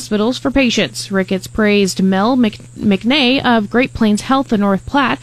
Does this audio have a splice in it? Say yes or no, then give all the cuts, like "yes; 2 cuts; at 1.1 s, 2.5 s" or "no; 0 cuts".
no; 0 cuts